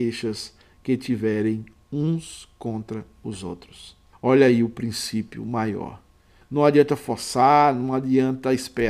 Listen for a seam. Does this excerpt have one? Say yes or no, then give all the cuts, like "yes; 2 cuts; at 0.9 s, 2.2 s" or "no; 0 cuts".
yes; 2 cuts; at 4.1 s, 6.4 s